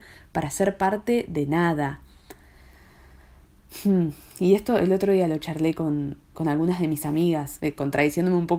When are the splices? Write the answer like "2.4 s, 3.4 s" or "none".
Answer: 7.6 s